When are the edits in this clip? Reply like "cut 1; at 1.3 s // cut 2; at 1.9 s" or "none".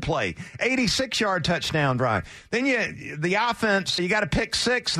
cut 1; at 4.0 s